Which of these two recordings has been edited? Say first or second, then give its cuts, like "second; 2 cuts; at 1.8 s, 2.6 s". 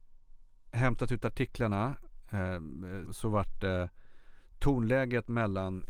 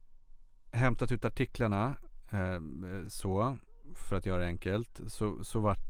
first; 1 cut; at 3.1 s